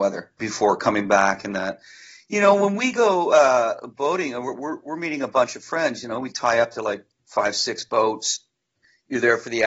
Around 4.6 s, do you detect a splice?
no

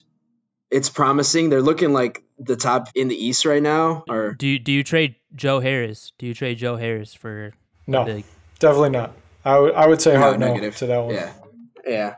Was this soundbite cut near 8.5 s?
no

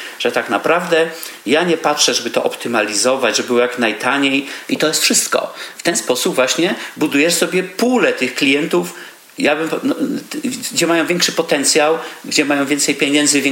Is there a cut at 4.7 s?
yes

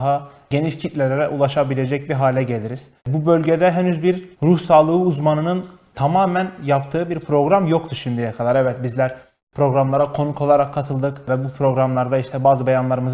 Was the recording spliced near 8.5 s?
no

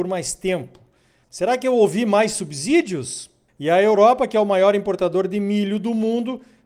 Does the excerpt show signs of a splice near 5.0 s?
no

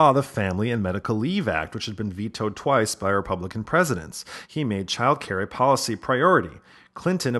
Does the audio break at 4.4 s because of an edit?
yes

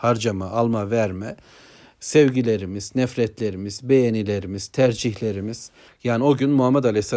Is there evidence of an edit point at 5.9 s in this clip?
yes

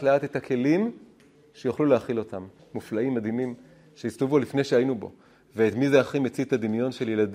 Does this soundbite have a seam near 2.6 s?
yes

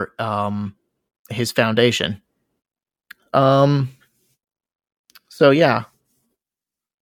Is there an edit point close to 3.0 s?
no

